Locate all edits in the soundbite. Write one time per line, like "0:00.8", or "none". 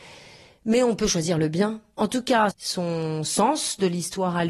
0:02.5